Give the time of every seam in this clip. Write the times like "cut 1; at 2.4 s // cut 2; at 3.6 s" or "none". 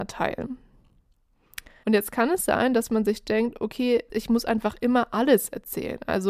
cut 1; at 1.8 s // cut 2; at 4.1 s